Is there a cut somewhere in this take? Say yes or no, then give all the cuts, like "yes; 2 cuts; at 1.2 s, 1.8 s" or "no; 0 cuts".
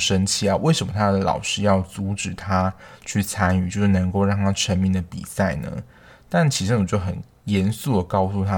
no; 0 cuts